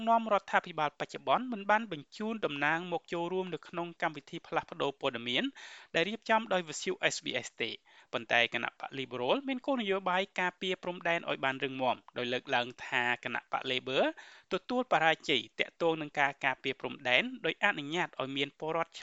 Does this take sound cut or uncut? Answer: uncut